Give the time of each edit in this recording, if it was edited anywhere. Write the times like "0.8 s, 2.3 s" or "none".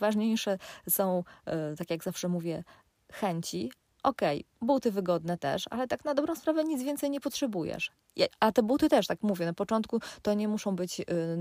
none